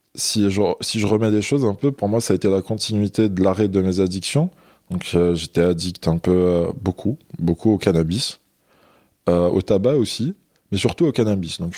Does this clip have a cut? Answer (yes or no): no